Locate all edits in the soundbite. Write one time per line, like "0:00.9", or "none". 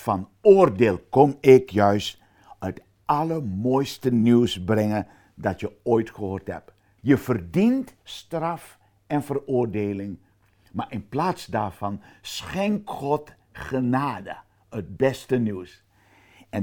0:07.0